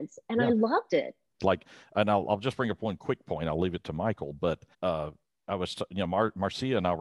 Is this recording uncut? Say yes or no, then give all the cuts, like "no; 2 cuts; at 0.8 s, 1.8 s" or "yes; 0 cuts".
no; 2 cuts; at 1.4 s, 4.7 s